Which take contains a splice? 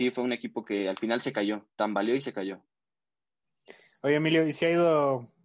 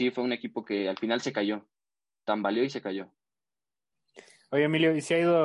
first; 1 cut; at 1.7 s

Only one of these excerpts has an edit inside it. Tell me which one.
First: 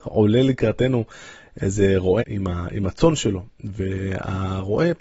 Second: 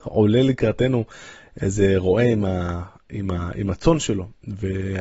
first; 1 cut; at 2.2 s

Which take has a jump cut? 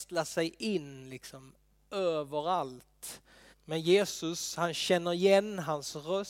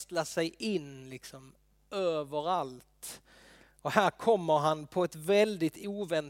first; 1 cut; at 3.5 s

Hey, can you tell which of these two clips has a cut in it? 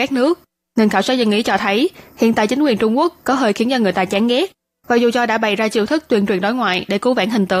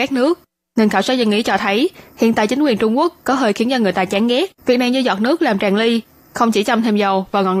second; 1 cut; at 4.6 s

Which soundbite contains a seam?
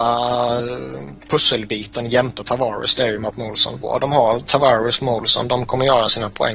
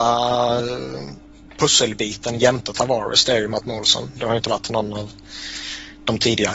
first; 2 cuts; at 1.2 s, 3.8 s

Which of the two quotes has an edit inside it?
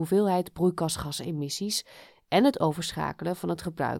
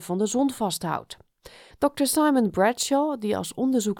second; 1 cut; at 1.7 s

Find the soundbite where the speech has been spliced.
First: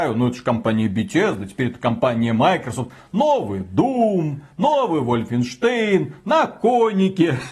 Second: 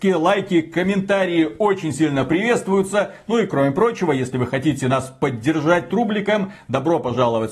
second; 1 cut; at 5.9 s

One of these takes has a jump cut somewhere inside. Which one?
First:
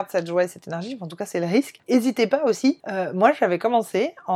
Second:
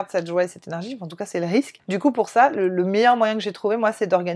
first; 1 cut; at 1.8 s

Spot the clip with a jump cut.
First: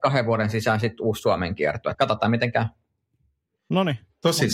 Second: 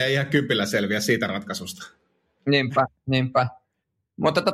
first; 1 cut; at 1.9 s

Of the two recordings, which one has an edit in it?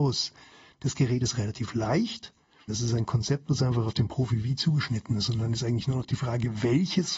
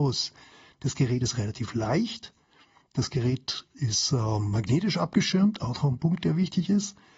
first; 1 cut; at 2.7 s

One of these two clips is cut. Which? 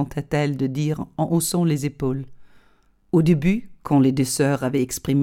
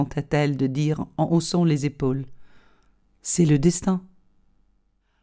first; 1 cut; at 3.0 s

